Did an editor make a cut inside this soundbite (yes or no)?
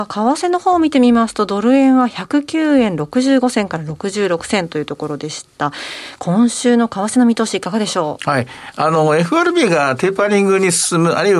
no